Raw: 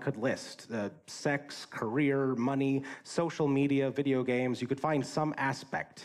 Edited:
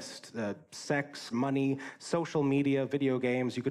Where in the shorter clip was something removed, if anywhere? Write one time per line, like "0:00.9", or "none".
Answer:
0:01.3